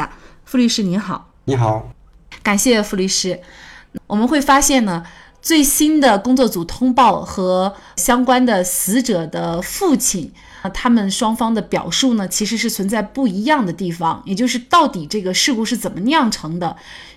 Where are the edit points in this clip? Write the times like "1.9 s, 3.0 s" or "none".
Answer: 1.4 s